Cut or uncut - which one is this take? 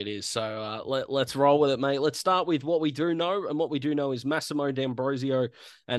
uncut